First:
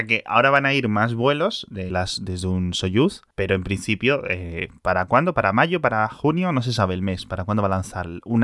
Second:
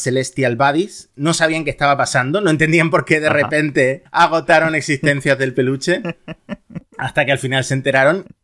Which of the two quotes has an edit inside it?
first; 1 cut; at 1.9 s

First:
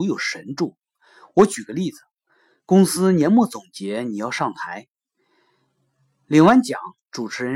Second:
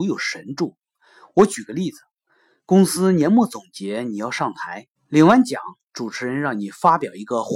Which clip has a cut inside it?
second; 1 cut; at 5.0 s

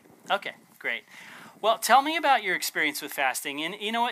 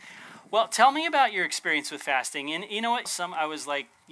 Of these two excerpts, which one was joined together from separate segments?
second; 1 cut; at 3.1 s

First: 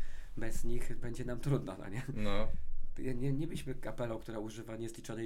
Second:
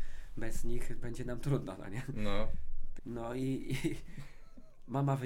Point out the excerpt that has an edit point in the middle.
second; 1 cut; at 3.0 s

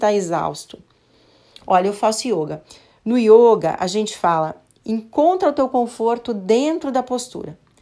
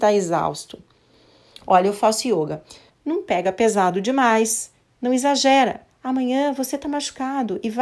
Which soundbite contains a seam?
second; 2 cuts; at 2.9 s, 5.9 s

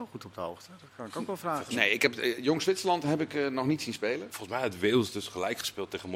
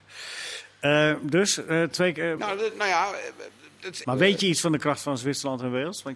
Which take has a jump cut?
second; 2 cuts; at 2.4 s, 4.0 s

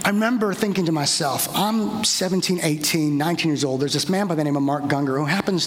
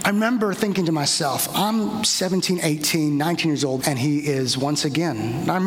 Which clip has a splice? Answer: second; 1 cut; at 3.8 s

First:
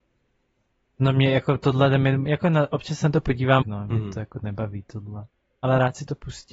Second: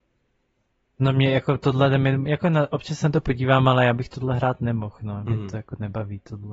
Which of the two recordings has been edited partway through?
first; 1 cut; at 3.6 s

